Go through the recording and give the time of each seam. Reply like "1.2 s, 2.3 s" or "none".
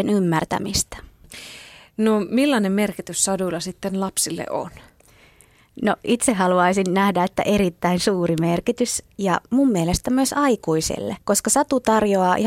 11.2 s